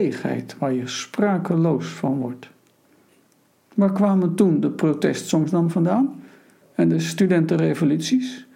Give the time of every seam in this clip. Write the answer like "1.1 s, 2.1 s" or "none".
none